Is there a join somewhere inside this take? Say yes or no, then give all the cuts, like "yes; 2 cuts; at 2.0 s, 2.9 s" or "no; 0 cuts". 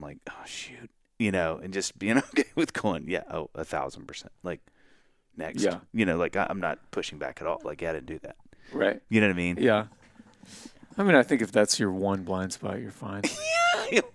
no; 0 cuts